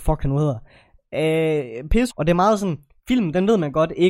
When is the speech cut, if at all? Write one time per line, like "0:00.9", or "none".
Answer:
0:02.1